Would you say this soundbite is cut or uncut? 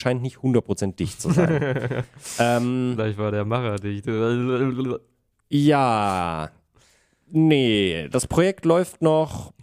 uncut